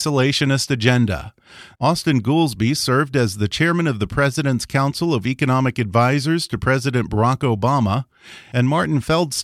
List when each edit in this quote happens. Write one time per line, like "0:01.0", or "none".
0:01.7